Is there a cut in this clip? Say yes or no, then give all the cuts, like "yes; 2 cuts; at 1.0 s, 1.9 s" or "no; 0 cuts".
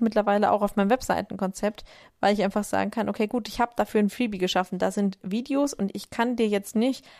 no; 0 cuts